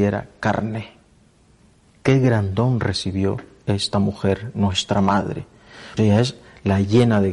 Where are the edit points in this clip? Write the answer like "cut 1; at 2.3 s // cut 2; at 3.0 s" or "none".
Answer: cut 1; at 6.0 s